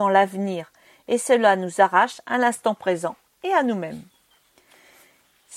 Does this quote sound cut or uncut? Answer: uncut